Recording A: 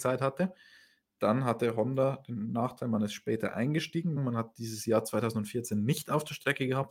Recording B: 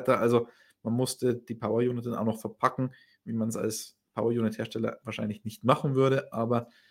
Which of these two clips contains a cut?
A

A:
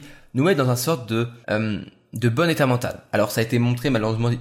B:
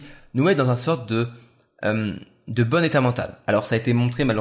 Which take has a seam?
A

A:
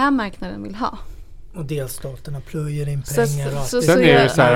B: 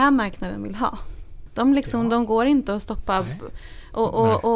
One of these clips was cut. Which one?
B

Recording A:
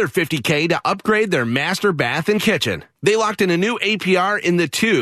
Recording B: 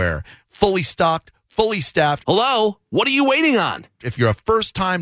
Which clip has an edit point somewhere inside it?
B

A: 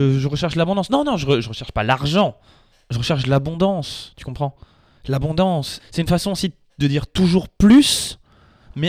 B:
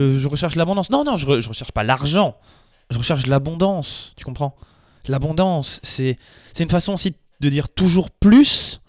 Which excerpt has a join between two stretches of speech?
A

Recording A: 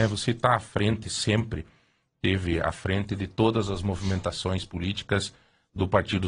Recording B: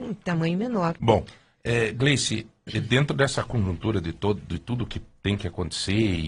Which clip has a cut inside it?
B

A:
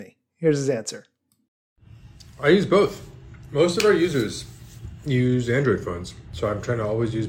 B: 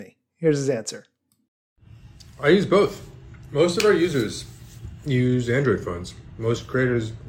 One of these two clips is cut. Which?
A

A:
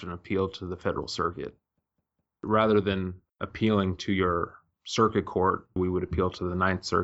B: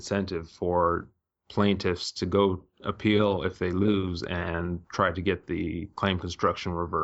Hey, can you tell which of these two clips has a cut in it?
A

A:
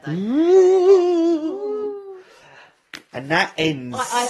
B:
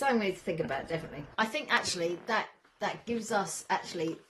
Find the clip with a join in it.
B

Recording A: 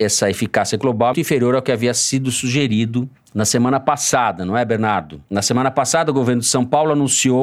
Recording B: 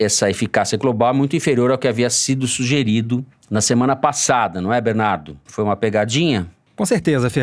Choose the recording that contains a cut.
A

